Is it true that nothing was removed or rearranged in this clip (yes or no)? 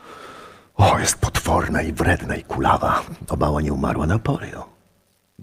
yes